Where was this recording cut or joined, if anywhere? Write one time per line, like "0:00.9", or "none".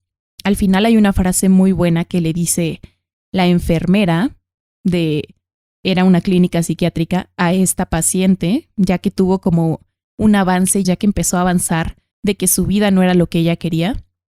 0:10.8
0:12.1